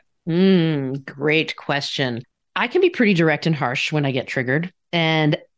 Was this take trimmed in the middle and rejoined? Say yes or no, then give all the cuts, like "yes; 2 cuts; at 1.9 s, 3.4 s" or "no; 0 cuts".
no; 0 cuts